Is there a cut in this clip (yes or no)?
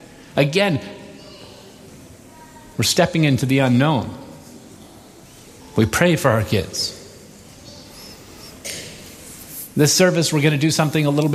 yes